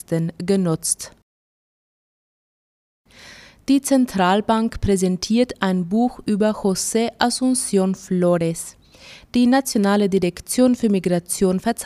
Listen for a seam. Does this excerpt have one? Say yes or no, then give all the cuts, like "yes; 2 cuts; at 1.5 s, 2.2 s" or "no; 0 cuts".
yes; 1 cut; at 9.3 s